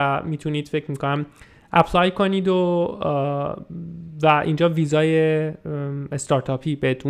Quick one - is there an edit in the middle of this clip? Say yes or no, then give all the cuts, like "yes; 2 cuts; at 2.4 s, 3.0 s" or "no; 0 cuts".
no; 0 cuts